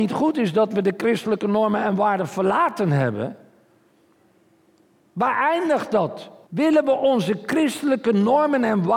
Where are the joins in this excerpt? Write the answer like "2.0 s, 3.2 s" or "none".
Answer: 6.5 s

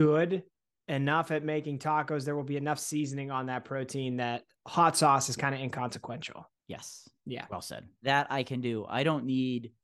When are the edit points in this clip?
6.6 s, 8.0 s

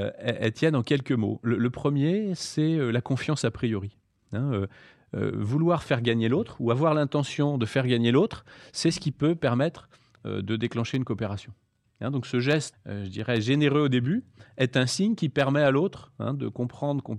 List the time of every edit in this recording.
12.7 s

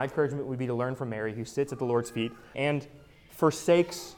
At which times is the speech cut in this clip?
2.5 s

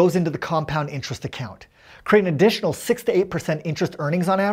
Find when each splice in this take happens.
none

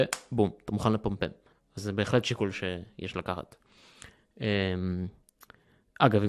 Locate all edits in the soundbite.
1.8 s

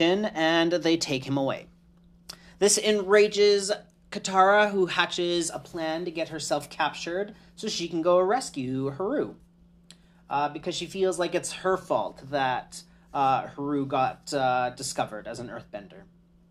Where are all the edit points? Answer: none

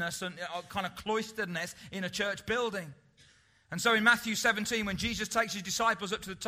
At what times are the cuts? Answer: none

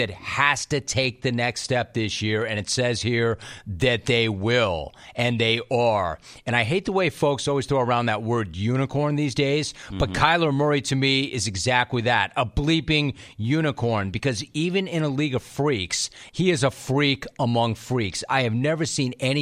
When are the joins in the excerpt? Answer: 16.3 s

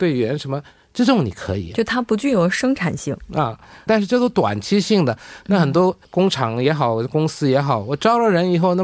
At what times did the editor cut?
3.9 s, 6.0 s

